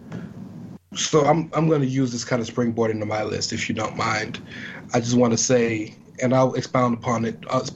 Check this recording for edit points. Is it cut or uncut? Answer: uncut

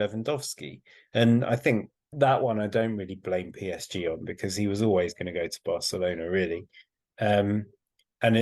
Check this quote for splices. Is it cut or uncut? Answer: cut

